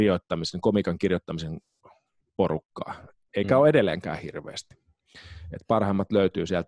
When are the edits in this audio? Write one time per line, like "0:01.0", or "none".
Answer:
none